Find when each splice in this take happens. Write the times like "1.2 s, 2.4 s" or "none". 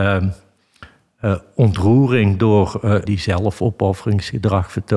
3.1 s